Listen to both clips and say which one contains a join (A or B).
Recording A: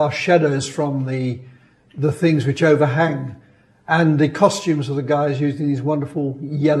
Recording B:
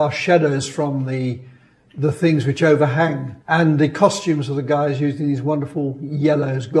B